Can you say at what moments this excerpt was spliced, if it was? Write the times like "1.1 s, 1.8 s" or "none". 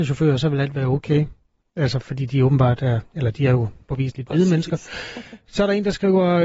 none